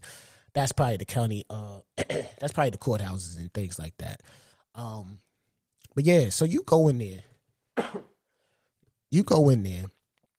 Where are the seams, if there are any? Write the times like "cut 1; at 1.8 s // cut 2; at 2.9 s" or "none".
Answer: none